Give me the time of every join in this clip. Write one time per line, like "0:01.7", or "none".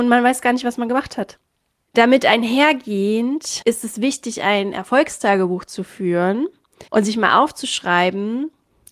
0:01.9
0:06.9